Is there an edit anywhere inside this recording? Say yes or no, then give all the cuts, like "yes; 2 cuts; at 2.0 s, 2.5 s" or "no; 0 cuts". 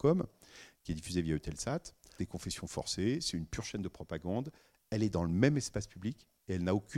yes; 1 cut; at 2.2 s